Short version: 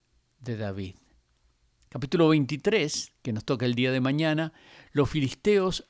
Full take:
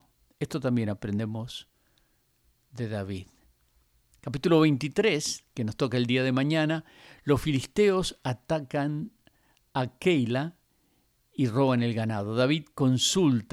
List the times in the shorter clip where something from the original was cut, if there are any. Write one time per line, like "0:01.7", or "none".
none

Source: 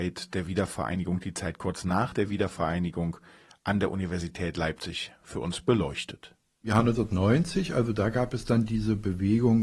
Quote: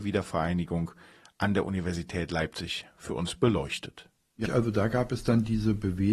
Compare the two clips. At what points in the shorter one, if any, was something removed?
0:04.4

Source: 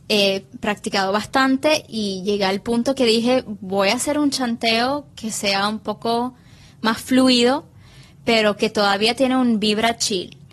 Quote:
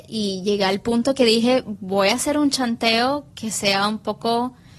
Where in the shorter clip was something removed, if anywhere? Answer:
none

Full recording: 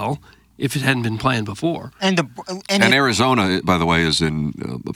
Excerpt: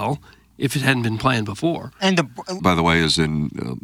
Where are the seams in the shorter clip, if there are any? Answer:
0:02.6

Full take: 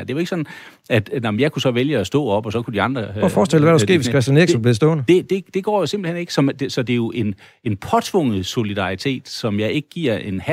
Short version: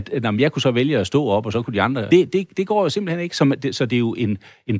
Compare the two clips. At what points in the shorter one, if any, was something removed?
0:02.1

